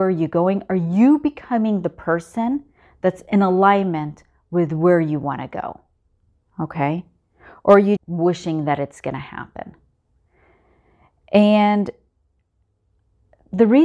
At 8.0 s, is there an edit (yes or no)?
yes